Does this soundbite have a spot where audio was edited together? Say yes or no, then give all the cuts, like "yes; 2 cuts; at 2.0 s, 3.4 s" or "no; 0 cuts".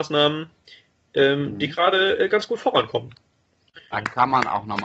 yes; 1 cut; at 3.9 s